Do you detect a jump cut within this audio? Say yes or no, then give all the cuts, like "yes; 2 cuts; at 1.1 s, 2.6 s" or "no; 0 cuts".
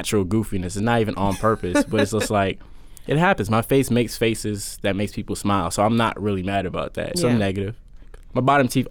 yes; 1 cut; at 7.1 s